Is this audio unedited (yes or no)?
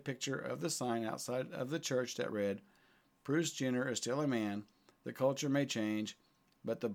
no